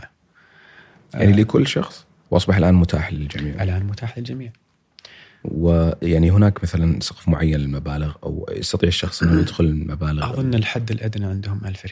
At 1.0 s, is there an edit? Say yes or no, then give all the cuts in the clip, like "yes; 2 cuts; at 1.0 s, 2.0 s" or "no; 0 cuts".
no; 1 cut; at 2.3 s